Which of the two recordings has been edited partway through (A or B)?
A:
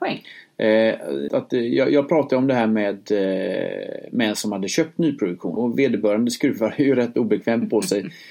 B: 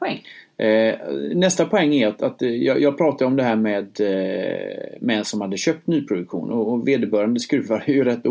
A